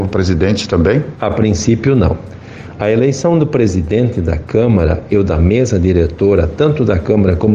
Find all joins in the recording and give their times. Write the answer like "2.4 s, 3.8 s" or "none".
none